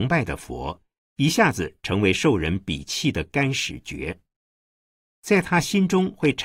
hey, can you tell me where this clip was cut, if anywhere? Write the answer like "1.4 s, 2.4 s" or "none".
none